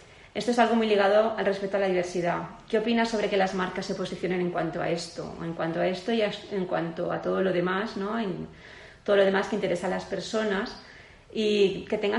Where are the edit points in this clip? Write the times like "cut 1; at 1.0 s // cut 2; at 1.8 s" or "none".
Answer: none